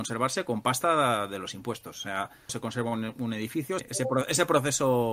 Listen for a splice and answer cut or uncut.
cut